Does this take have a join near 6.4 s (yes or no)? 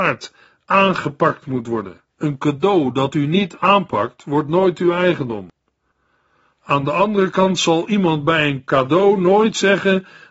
no